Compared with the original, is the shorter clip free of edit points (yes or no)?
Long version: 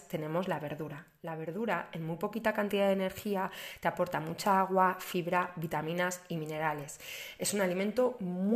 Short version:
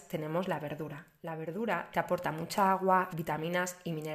no